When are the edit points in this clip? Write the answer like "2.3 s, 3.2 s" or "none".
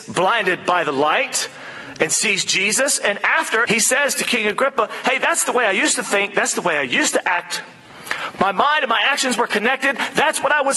3.7 s, 8.3 s